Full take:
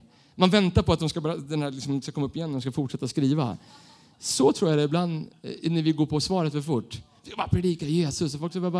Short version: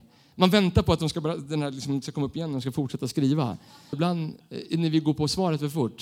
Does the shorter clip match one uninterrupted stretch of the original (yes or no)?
no